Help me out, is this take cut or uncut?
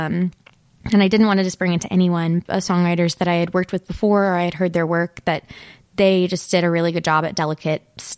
cut